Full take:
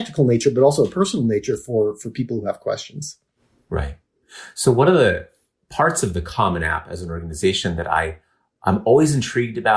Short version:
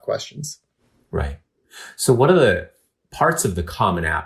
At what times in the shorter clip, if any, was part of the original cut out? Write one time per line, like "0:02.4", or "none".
none